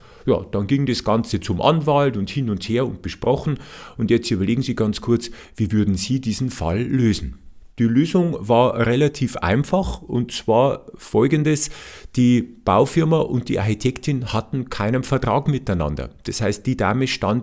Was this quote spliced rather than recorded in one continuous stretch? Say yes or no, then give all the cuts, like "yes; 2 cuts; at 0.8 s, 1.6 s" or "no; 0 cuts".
yes; 1 cut; at 7.7 s